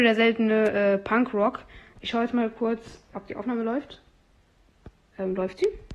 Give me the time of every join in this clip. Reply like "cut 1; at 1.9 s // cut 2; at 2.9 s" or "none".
cut 1; at 3.1 s